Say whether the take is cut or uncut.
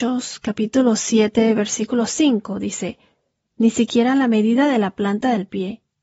cut